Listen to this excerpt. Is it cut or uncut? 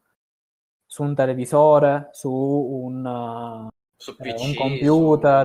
uncut